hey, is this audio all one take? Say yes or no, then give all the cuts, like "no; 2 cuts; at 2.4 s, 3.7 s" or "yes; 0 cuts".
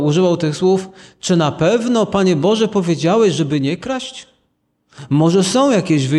yes; 0 cuts